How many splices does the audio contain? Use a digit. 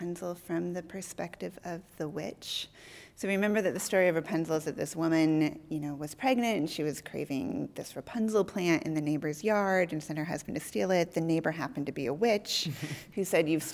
0